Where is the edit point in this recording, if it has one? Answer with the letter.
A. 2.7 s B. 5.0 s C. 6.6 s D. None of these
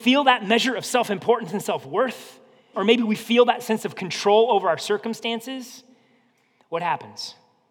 A